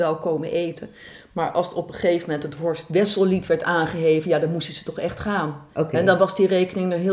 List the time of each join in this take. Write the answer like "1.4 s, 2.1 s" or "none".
none